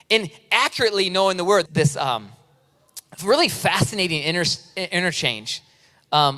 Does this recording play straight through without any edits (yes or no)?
no